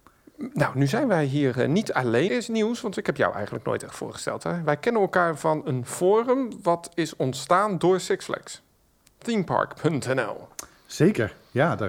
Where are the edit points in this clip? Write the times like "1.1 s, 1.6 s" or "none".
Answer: 2.3 s